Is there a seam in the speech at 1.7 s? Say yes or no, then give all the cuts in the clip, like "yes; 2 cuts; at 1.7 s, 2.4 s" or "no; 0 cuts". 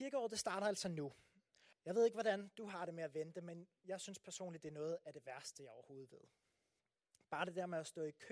yes; 1 cut; at 1.7 s